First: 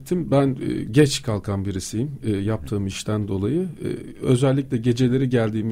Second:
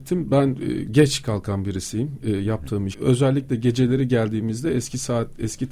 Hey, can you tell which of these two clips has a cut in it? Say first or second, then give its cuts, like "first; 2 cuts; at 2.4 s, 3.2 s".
second; 1 cut; at 2.9 s